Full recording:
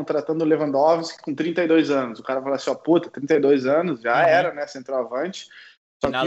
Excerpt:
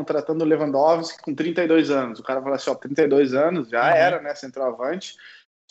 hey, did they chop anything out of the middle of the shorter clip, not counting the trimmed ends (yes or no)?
yes